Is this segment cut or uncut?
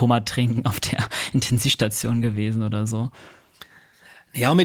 uncut